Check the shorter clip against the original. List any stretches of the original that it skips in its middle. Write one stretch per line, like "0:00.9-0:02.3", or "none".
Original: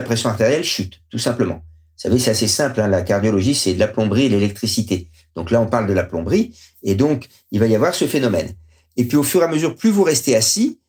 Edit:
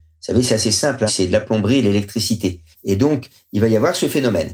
0:02.8-0:03.5
0:05.2-0:06.7